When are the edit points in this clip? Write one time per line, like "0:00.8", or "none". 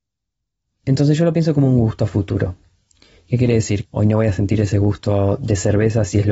0:03.8